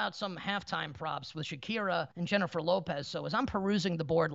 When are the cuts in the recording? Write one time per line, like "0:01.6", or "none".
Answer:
0:02.1